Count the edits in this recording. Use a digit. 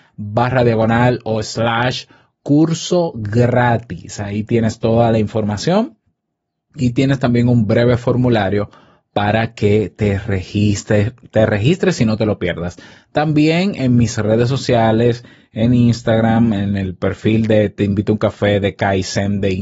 0